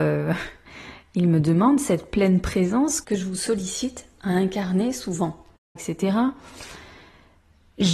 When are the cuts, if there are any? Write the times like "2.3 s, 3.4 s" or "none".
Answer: 5.8 s